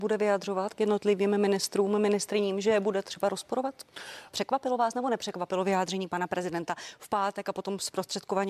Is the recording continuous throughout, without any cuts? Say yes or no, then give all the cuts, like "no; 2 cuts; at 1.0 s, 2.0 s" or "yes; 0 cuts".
no; 1 cut; at 4.3 s